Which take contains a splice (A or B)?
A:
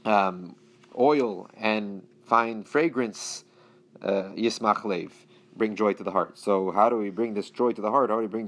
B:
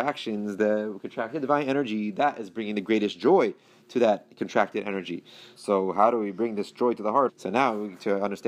B